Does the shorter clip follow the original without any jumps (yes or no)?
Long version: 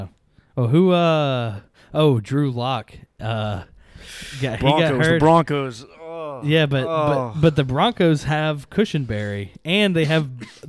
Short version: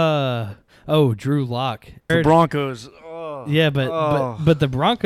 no